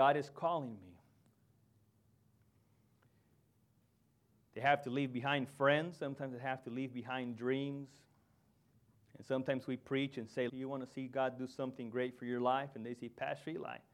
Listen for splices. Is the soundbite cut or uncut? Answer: cut